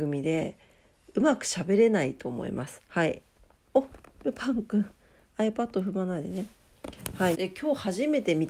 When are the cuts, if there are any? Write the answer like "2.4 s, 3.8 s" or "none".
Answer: 2.9 s, 7.3 s